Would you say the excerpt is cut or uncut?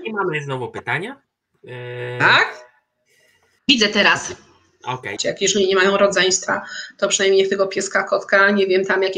cut